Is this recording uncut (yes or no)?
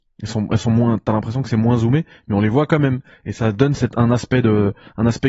yes